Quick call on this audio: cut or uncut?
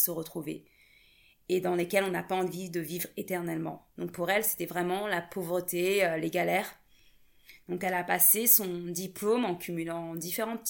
uncut